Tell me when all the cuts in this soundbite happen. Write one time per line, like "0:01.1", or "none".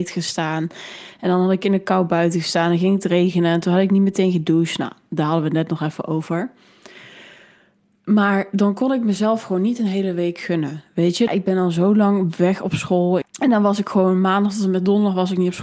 0:11.3
0:13.2